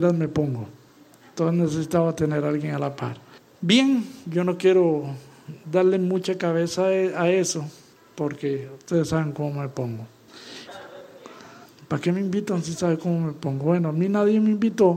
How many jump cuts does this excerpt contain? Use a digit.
1